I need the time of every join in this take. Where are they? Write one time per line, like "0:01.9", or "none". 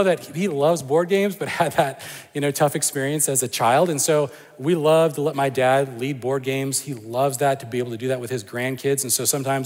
none